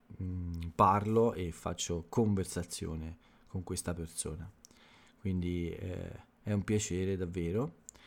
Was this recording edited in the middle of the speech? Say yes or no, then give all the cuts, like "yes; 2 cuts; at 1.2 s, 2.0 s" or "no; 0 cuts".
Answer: no; 0 cuts